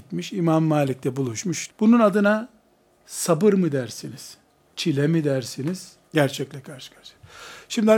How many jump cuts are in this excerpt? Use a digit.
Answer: 2